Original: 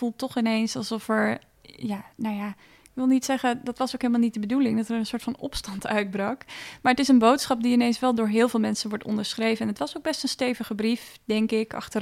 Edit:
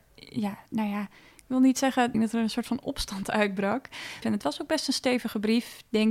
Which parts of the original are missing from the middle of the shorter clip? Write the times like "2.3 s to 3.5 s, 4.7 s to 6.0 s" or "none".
3.6 s to 4.7 s, 6.8 s to 9.6 s